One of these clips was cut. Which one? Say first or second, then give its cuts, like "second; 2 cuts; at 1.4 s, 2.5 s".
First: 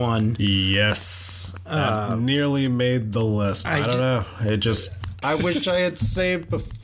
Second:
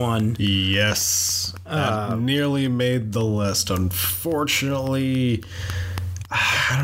first; 2 cuts; at 3.6 s, 5.2 s